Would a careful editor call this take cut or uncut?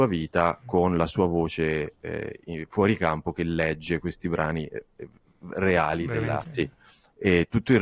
cut